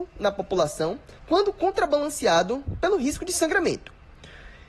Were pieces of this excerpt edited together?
yes; 1 cut; at 1.2 s

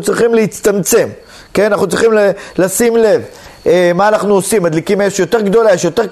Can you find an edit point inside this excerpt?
no; 0 cuts

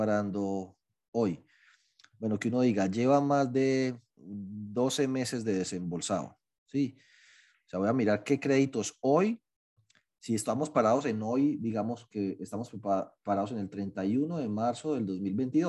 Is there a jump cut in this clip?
yes; 1 cut; at 4.1 s

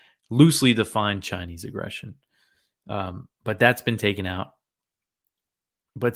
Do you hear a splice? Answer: no; 0 cuts

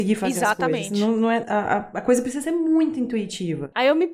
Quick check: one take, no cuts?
no; 1 cut; at 1.4 s

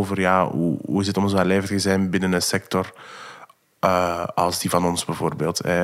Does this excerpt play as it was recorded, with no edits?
yes; 0 cuts

